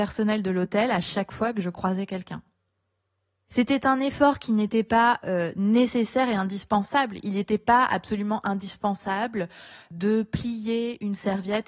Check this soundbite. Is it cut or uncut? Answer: cut